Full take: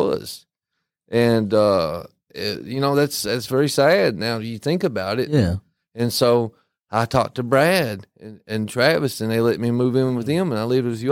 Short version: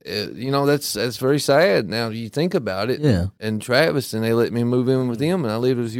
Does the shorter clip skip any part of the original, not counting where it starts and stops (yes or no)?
yes